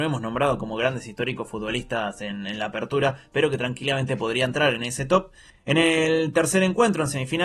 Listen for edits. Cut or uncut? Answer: cut